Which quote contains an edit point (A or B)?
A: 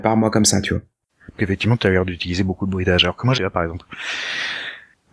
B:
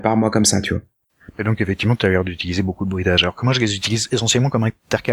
A